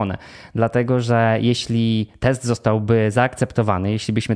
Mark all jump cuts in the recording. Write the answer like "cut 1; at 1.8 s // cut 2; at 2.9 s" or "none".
none